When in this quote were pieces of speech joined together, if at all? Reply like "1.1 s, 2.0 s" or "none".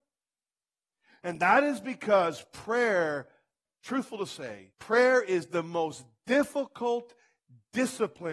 3.7 s, 4.7 s